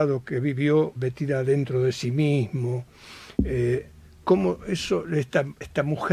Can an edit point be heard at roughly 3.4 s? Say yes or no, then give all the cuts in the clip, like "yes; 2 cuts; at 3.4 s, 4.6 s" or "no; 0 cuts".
no; 1 cut; at 1.0 s